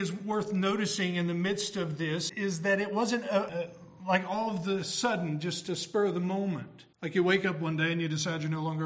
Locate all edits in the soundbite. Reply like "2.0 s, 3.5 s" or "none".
2.3 s, 3.5 s, 6.9 s